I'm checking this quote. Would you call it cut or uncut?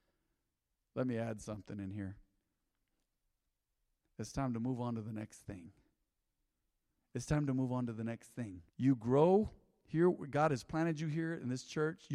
cut